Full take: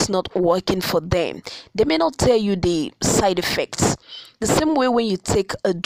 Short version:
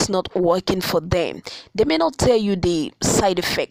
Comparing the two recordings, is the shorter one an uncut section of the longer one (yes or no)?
yes